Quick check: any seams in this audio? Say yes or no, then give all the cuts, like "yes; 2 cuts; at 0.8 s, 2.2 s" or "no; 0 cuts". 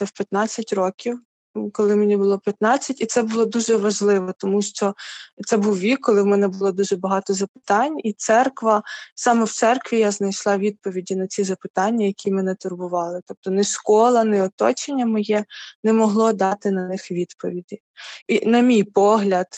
yes; 1 cut; at 18.2 s